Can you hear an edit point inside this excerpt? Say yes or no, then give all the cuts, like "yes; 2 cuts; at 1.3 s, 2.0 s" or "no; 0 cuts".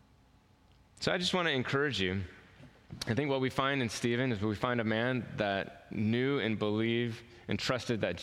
no; 0 cuts